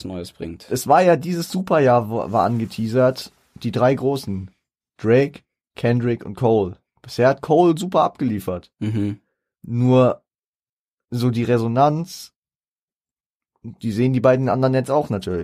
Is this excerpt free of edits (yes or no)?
yes